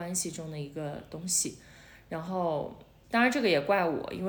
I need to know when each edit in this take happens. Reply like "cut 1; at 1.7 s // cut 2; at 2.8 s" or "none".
cut 1; at 3.0 s